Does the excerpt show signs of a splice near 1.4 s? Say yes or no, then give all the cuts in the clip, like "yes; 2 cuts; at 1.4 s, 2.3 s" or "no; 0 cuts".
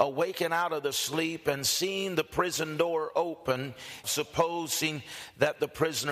no; 1 cut; at 4.0 s